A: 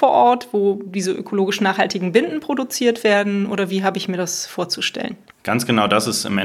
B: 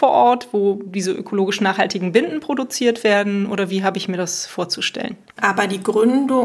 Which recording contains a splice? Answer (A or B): B